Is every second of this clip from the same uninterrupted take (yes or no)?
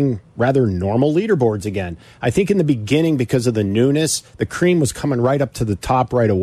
yes